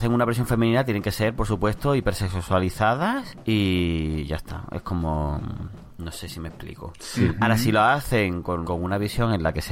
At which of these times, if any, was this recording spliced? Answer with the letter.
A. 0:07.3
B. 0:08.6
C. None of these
B